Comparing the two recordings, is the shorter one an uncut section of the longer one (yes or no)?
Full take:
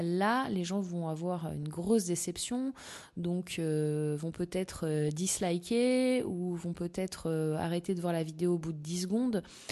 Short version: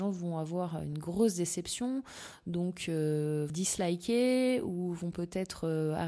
no